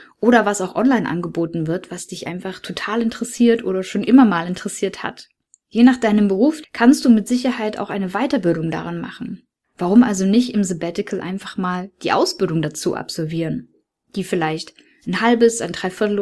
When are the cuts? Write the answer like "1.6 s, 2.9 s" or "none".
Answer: 6.6 s, 9.7 s

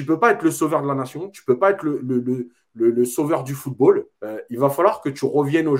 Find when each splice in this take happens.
4.1 s

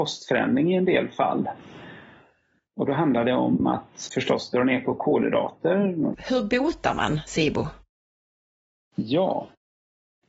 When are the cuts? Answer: 4.1 s, 6.1 s

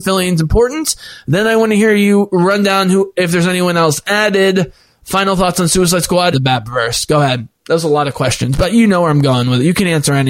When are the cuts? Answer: 6.3 s

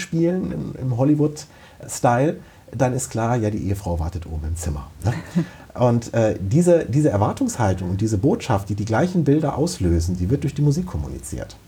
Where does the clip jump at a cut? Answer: none

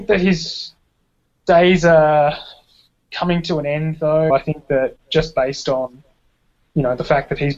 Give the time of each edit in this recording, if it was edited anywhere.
4.3 s

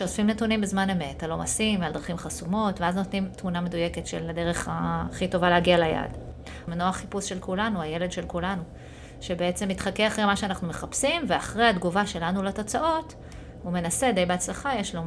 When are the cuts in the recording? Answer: 6.7 s

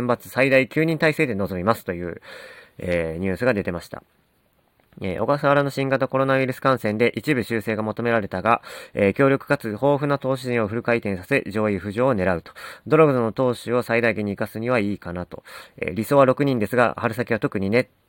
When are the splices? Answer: none

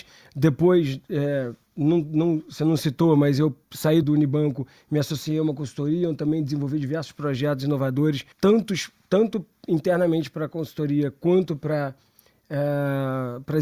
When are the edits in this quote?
4.0 s, 8.3 s

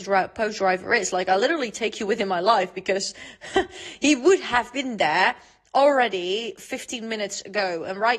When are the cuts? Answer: none

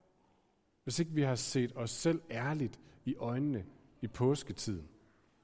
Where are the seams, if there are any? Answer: none

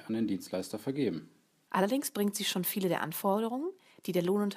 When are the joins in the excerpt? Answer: 1.7 s

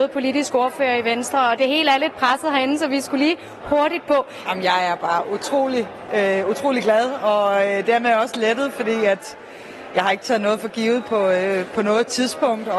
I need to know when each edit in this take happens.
4.4 s

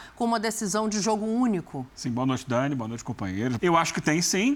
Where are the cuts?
1.9 s, 3.6 s

